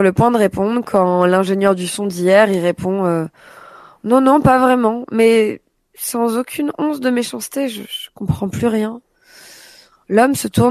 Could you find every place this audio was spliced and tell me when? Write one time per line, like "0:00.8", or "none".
none